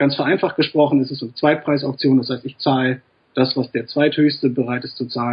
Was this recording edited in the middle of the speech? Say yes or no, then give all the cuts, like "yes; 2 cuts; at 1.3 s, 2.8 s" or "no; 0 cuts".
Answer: no; 0 cuts